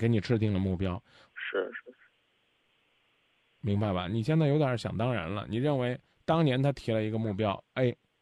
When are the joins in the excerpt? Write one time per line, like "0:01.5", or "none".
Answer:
0:01.3